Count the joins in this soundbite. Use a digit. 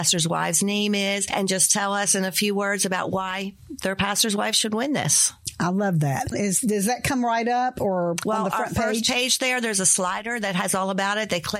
1